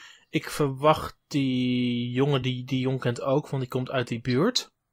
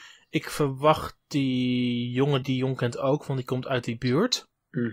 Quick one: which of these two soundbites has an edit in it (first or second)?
second